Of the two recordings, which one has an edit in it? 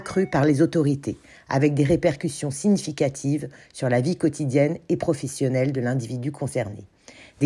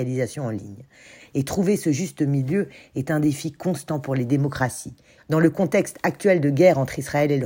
second; 2 cuts; at 1.2 s, 5.2 s

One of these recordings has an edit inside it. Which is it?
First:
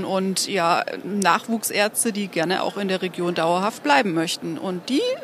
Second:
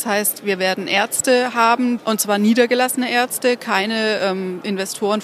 second; 1 cut; at 2.0 s

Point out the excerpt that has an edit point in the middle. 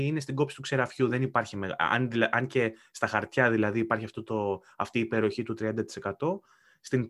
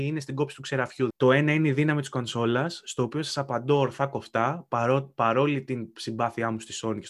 second; 1 cut; at 1.1 s

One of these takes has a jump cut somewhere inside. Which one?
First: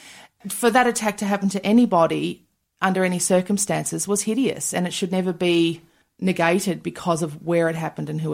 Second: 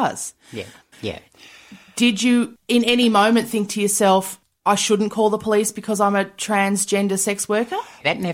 second; 1 cut; at 0.9 s

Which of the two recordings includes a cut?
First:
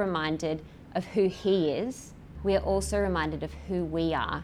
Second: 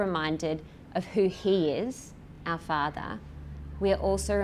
first; 1 cut; at 2.4 s

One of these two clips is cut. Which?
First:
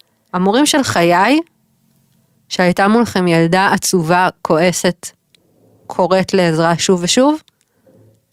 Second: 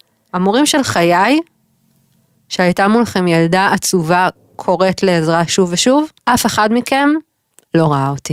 second; 2 cuts; at 4.3 s, 6.2 s

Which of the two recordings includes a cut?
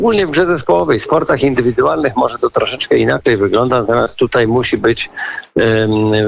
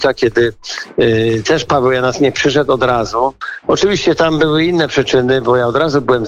second; 1 cut; at 3.6 s

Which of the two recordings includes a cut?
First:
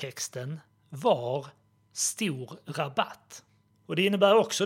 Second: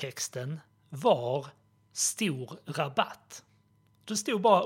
first; 1 cut; at 3.7 s

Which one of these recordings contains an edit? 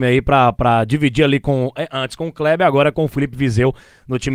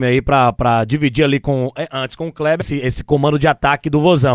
second; 1 cut; at 2.6 s

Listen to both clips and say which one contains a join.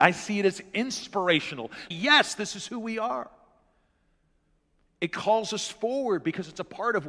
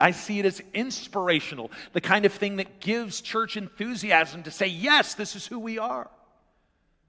first; 1 cut; at 1.9 s

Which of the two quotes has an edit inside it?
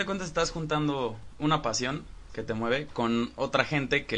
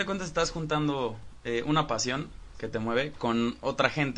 first; 1 cut; at 1.4 s

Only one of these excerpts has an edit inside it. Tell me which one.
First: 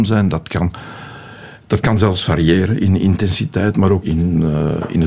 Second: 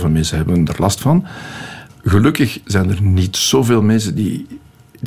first; 1 cut; at 4.0 s

